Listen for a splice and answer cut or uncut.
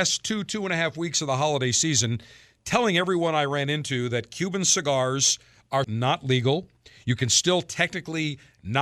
cut